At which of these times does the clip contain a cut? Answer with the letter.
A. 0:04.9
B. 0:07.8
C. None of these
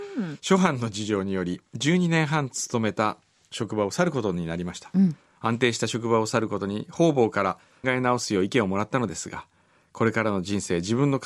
B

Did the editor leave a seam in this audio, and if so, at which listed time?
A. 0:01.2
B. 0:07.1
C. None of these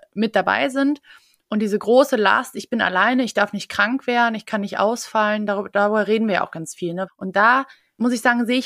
B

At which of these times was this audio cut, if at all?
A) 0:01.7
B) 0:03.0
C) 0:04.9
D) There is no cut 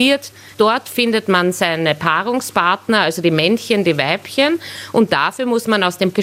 D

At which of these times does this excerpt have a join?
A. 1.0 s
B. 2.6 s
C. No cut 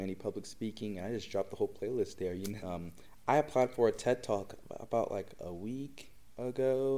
B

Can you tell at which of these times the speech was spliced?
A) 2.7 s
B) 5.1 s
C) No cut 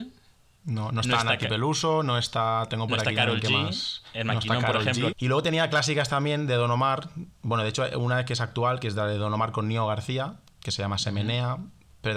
B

